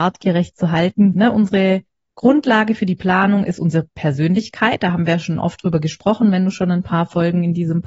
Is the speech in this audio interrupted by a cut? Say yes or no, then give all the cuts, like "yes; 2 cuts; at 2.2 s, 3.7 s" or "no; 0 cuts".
yes; 1 cut; at 1.1 s